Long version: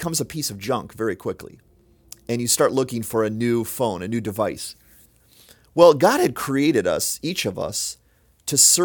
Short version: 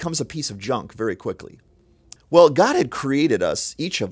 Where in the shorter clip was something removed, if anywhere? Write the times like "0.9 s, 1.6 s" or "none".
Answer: 2.2 s